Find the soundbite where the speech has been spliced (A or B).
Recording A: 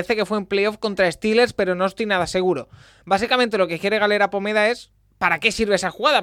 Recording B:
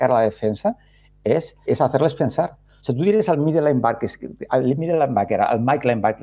B